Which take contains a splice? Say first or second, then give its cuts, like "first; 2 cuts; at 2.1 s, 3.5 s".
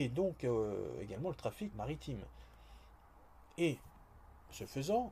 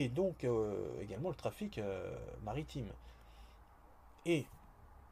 first; 1 cut; at 1.7 s